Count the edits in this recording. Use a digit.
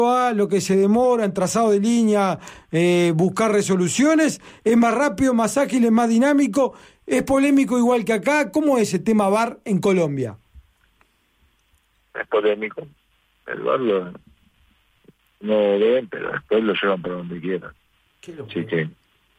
0